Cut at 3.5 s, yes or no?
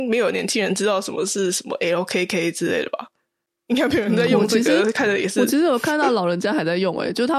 no